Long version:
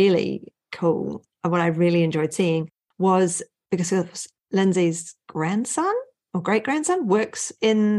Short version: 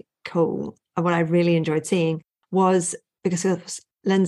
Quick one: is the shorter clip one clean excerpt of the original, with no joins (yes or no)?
yes